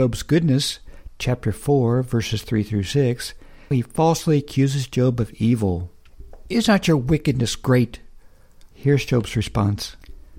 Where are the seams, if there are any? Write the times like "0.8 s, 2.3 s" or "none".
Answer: 3.7 s, 8.7 s

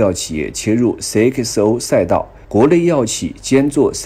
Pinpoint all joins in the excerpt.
2.4 s

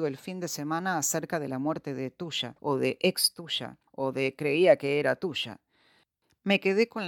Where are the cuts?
2.6 s, 3.9 s

